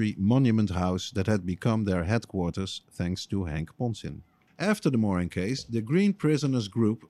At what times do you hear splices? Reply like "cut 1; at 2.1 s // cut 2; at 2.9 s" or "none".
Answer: cut 1; at 4.5 s